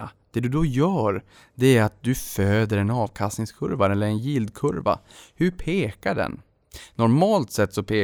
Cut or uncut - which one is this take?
uncut